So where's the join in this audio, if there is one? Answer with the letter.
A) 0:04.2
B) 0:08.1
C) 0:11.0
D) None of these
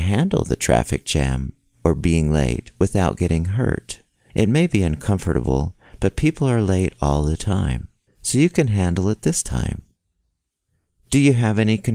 B